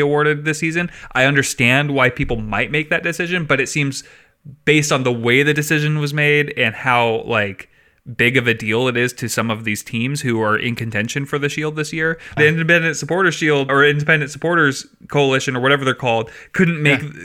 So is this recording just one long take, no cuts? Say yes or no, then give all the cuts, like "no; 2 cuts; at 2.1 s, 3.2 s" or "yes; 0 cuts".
no; 2 cuts; at 12.4 s, 13.7 s